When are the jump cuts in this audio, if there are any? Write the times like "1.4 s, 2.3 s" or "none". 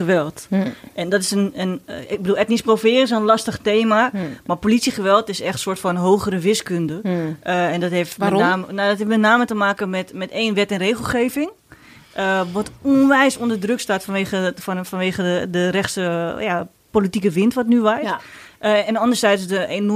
none